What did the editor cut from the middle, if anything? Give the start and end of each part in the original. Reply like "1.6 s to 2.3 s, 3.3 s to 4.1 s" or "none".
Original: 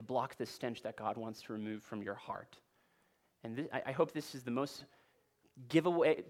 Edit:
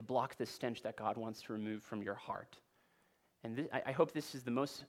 none